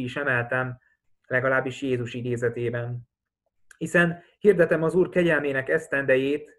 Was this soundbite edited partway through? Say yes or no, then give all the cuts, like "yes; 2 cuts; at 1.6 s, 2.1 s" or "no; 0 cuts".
yes; 1 cut; at 1.1 s